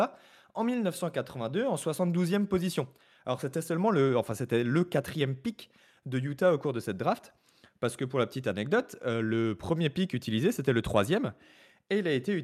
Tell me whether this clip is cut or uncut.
uncut